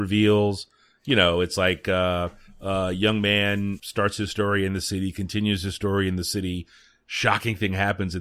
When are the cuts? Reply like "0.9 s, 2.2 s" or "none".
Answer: 3.8 s